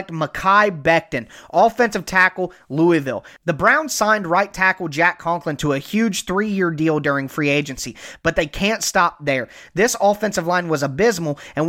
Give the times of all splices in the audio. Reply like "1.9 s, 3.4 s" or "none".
none